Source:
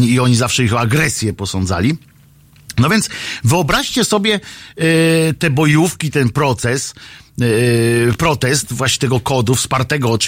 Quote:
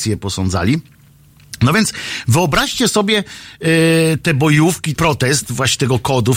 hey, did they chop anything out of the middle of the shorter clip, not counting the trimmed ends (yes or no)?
yes